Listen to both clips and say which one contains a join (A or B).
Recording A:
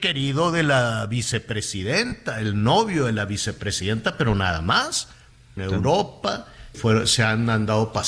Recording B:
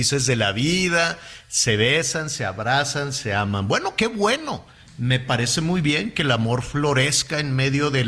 A